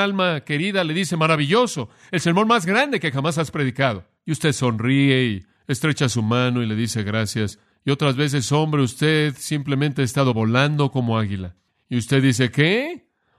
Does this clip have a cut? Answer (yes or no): yes